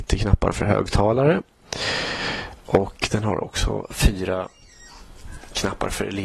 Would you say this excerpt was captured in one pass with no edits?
yes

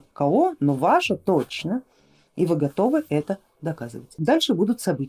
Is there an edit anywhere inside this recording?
no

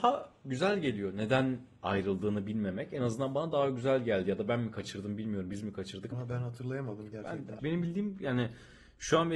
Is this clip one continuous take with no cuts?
no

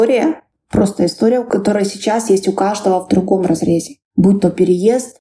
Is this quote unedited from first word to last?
yes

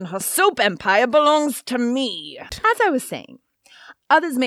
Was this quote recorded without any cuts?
no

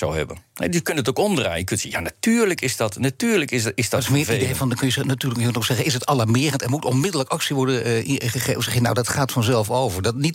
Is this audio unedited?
yes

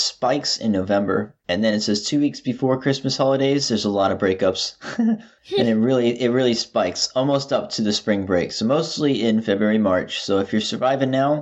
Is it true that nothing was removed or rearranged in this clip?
yes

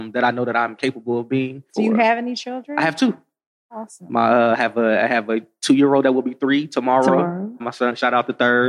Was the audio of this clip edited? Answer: yes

